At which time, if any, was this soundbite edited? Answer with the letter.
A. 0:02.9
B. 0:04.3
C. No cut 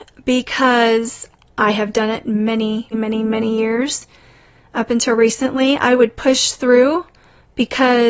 A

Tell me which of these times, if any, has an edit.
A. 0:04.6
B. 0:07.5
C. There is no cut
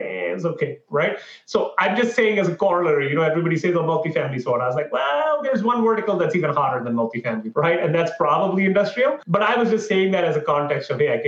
B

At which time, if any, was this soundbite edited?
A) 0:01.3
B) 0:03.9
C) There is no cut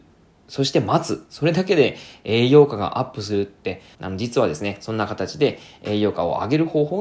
B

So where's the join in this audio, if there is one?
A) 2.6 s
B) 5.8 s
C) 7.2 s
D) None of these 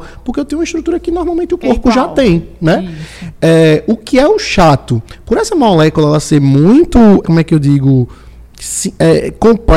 C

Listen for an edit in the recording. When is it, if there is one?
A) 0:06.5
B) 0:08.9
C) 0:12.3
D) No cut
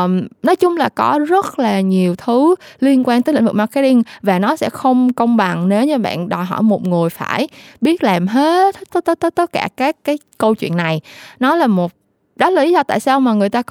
B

